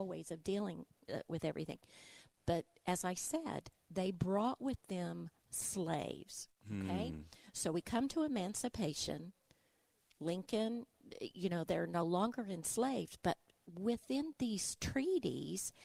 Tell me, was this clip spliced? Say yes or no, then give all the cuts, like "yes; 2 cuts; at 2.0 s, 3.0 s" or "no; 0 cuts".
no; 0 cuts